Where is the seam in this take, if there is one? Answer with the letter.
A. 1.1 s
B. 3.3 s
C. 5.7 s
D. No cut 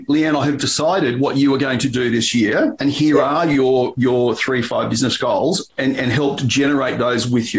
C